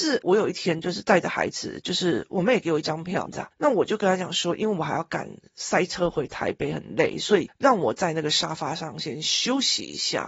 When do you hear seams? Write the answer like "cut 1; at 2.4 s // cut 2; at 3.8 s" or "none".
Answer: cut 1; at 3.3 s